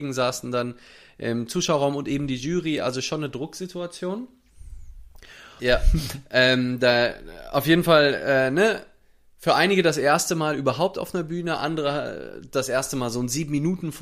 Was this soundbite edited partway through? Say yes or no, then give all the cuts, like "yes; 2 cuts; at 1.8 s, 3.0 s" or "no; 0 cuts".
yes; 1 cut; at 5.6 s